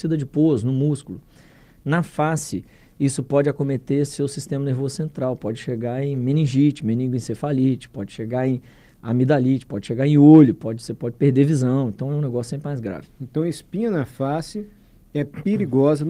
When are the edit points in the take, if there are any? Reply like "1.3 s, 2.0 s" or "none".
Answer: none

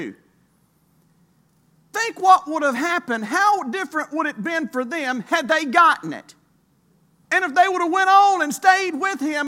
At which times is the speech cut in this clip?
7.2 s

